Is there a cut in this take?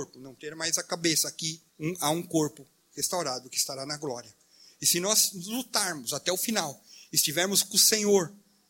yes; 1 cut; at 1.7 s

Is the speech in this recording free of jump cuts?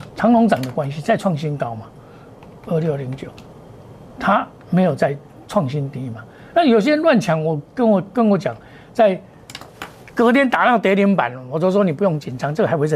yes; 0 cuts

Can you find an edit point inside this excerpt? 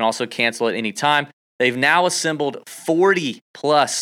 no; 0 cuts

